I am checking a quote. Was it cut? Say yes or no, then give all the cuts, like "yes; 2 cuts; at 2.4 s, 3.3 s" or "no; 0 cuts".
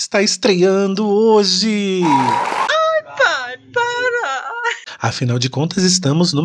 yes; 1 cut; at 2.7 s